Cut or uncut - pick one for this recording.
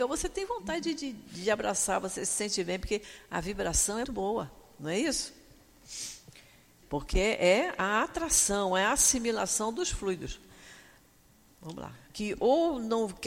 cut